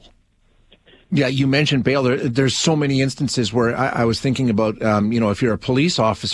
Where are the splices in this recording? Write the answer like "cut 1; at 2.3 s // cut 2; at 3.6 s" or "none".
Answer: cut 1; at 1.1 s